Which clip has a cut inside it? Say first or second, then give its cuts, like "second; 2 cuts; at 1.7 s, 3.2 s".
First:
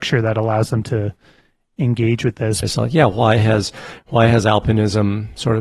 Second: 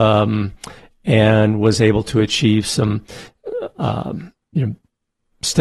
first; 1 cut; at 2.6 s